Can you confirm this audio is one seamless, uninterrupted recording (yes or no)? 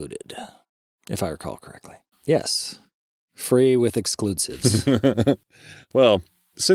no